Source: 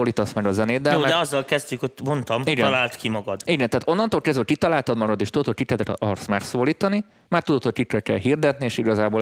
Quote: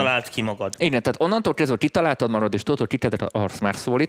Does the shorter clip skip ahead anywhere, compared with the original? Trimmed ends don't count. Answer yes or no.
no